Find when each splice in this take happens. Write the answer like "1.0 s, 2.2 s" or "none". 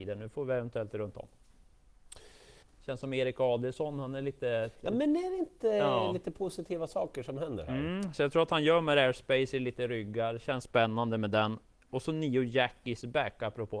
2.6 s